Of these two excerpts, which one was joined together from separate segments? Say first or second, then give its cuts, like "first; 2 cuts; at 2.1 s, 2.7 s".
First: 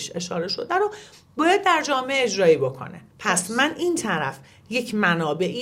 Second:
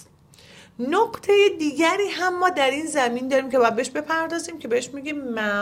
first; 1 cut; at 3.1 s